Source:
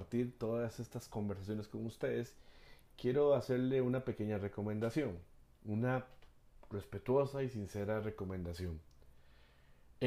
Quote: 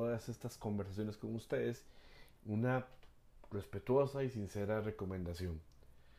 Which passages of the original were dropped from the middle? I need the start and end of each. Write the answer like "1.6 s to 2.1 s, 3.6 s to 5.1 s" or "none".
2.9 s to 5.6 s

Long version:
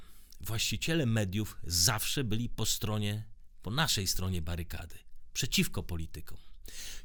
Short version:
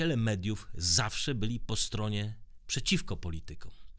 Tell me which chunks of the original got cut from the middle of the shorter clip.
3.5 s to 5.3 s

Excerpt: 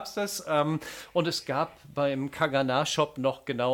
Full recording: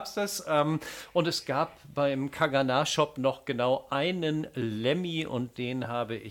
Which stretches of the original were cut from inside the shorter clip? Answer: none

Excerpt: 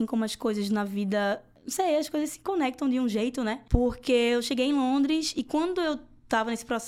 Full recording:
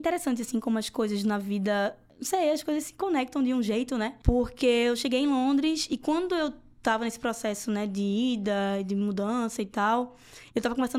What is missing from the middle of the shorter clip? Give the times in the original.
none

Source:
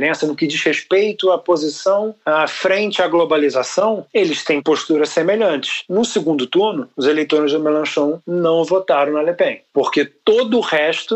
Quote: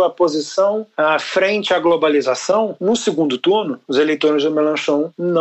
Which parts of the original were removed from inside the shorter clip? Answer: 4.1 s to 5.9 s

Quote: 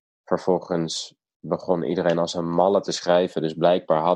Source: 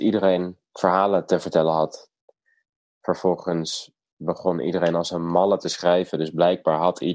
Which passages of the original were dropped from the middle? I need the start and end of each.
none

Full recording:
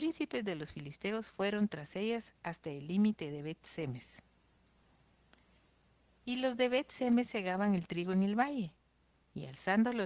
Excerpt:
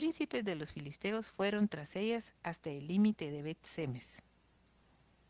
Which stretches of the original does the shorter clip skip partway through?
none

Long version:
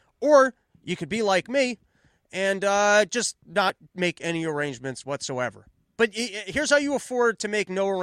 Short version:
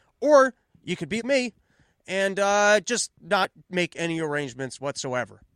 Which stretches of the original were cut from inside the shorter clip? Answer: 1.2 s to 1.4 s

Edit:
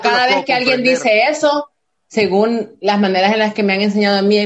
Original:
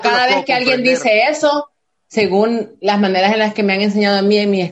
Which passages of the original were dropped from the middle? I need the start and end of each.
none

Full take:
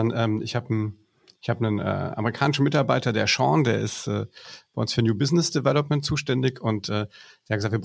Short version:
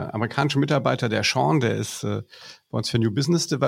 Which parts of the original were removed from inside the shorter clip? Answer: none

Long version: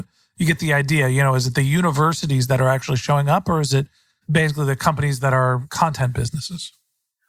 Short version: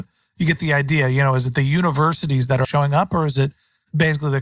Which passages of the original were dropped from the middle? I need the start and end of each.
2.6 s to 3.0 s

